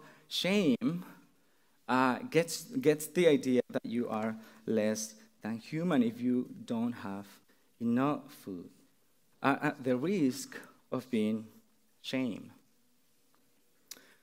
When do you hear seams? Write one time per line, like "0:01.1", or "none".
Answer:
0:09.3
0:10.8